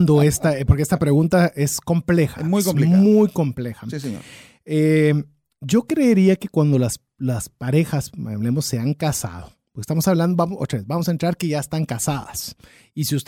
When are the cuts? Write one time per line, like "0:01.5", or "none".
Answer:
none